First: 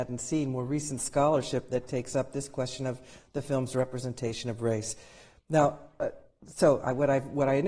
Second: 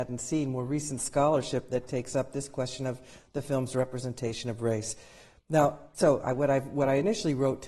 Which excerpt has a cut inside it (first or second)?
second